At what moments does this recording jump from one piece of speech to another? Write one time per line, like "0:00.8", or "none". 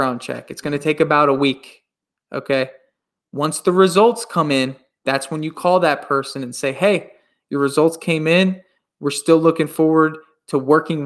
none